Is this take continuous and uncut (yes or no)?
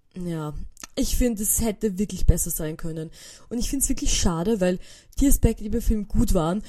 yes